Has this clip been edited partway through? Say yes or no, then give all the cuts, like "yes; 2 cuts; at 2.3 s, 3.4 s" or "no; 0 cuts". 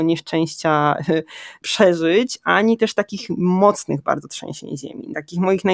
no; 0 cuts